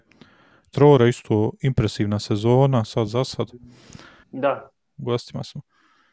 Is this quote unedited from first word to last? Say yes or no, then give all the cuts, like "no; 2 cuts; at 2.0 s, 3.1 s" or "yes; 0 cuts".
no; 1 cut; at 4.2 s